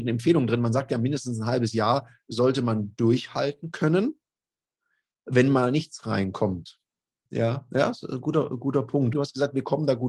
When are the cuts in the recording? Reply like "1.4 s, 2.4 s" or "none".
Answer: 7.3 s, 9.1 s